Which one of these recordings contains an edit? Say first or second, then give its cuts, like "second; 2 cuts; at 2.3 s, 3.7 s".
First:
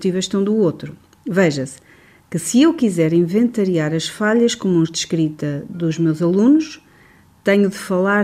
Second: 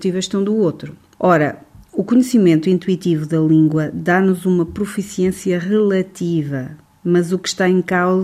second; 1 cut; at 1.2 s